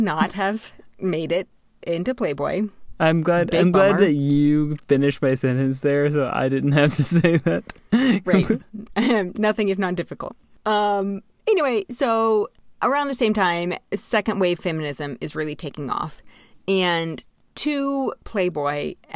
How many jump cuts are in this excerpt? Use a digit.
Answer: 0